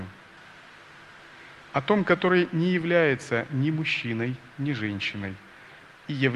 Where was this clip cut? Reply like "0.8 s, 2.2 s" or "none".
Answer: 1.6 s